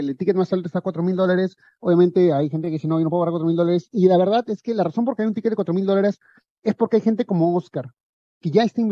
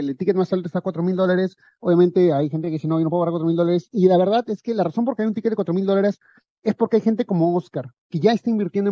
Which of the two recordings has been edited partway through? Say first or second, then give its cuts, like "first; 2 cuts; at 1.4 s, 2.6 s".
second; 1 cut; at 8.0 s